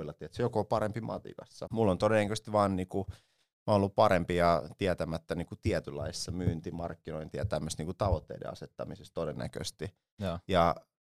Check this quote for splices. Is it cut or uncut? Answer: cut